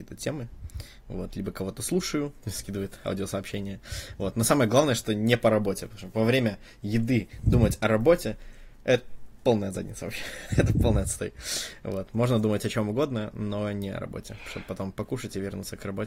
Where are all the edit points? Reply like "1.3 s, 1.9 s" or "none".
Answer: 2.4 s